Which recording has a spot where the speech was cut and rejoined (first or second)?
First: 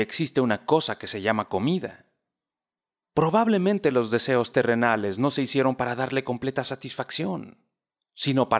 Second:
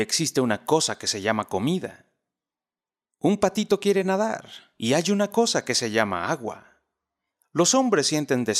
first